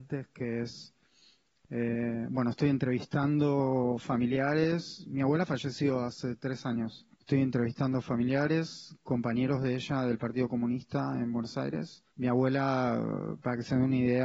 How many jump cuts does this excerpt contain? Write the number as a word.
two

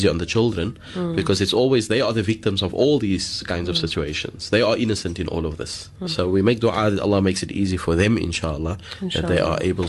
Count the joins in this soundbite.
one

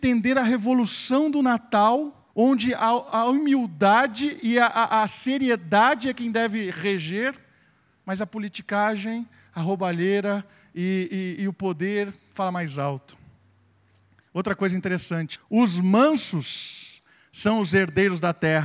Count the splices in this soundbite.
three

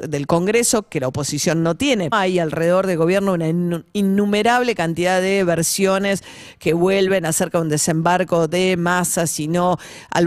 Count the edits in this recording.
one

